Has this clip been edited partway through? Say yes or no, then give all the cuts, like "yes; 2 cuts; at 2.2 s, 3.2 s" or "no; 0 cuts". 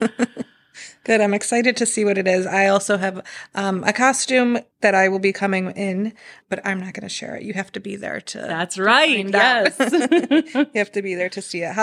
yes; 1 cut; at 4.7 s